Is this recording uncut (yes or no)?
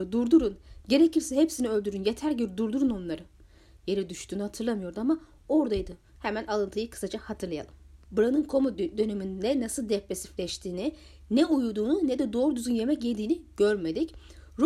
no